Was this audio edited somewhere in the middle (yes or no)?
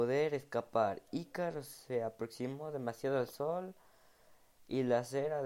no